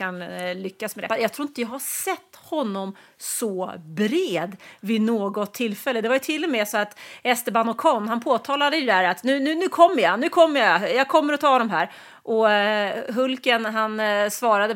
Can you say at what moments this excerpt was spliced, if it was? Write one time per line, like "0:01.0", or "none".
0:01.1